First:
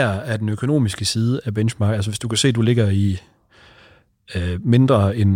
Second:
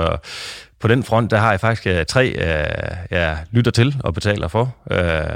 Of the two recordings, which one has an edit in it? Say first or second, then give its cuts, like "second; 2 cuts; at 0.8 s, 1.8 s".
second; 1 cut; at 2.1 s